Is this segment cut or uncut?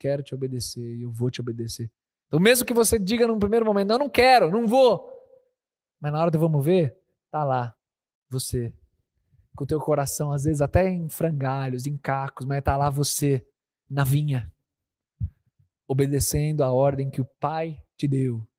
uncut